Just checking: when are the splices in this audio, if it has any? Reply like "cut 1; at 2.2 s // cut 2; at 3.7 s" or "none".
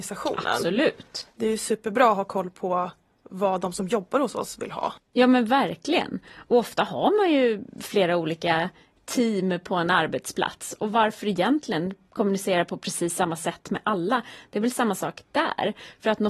none